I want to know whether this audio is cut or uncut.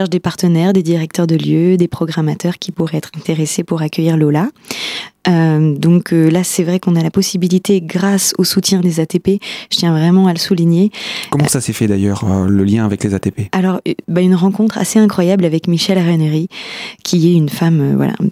uncut